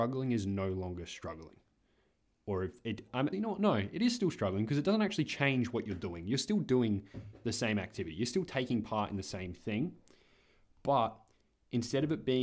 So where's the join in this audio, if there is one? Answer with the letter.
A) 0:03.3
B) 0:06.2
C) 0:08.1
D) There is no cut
A